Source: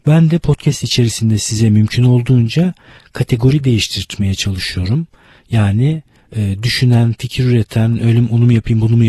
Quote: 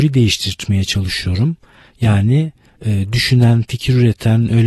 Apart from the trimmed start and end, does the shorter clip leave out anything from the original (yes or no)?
no